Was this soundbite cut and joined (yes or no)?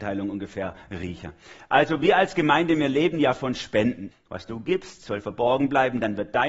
yes